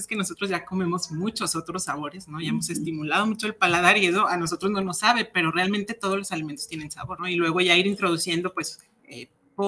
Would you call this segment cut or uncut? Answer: cut